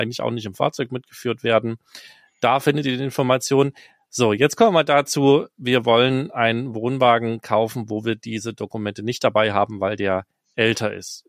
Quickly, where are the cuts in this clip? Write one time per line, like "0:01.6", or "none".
none